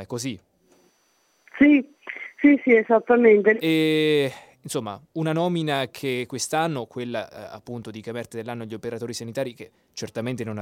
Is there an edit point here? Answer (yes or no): yes